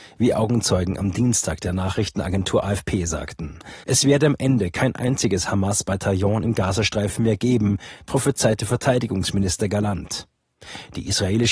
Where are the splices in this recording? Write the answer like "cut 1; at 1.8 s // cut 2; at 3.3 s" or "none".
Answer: cut 1; at 3.8 s // cut 2; at 8.0 s